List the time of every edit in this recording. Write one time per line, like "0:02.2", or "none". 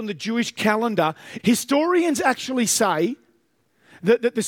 0:01.4

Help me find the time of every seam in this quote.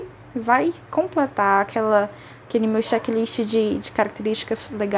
none

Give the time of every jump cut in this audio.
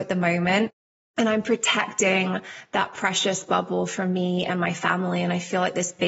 0:01.0

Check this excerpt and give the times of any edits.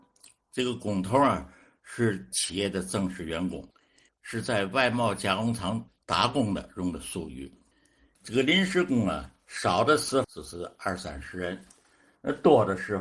0:04.1
0:08.2
0:10.2

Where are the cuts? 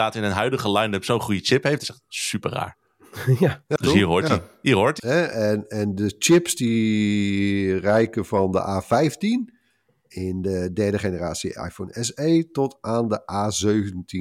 0:05.0

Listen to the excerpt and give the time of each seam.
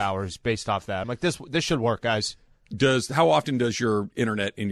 none

